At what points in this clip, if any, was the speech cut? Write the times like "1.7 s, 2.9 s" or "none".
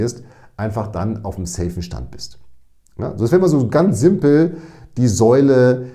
none